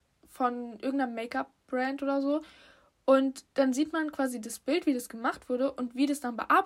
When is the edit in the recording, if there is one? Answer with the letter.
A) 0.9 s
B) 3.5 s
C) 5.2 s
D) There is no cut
B